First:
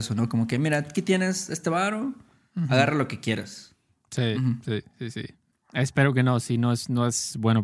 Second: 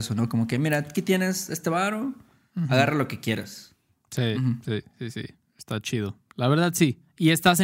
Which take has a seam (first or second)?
first